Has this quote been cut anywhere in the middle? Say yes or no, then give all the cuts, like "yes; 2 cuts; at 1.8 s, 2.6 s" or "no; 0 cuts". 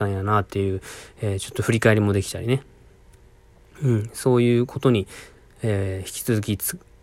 no; 0 cuts